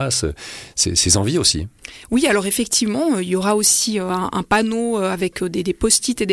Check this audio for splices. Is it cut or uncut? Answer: uncut